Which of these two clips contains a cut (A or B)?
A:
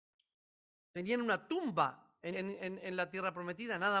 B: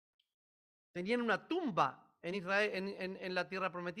A